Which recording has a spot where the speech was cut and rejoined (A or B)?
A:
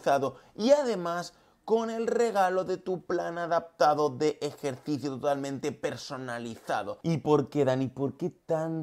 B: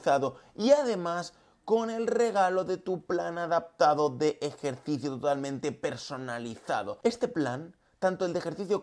A